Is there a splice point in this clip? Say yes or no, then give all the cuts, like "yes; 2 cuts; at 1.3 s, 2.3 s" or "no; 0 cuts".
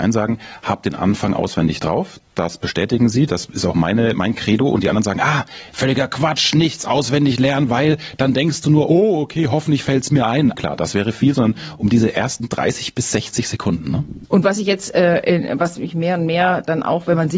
yes; 2 cuts; at 10.5 s, 14.3 s